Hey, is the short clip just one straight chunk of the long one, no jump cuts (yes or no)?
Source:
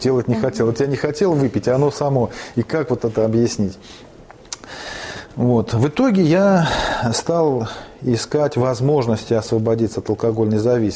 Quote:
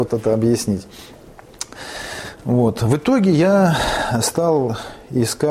yes